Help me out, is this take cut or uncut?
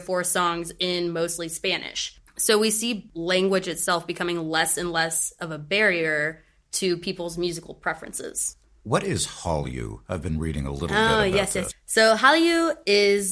cut